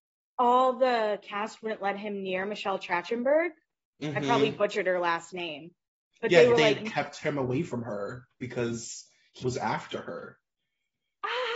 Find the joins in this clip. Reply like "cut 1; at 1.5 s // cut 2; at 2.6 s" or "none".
cut 1; at 9.4 s